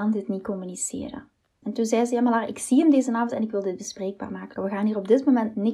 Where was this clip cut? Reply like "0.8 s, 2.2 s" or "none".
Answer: 1.6 s, 4.6 s